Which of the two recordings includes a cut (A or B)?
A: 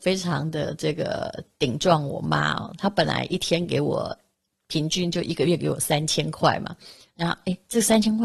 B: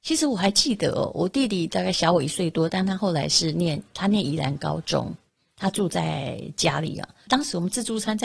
B